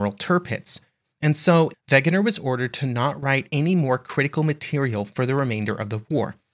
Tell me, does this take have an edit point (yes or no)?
yes